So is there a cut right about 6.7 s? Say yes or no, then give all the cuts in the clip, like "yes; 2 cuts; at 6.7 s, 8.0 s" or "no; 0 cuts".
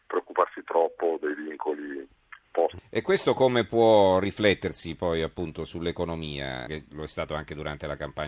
yes; 2 cuts; at 2.8 s, 6.7 s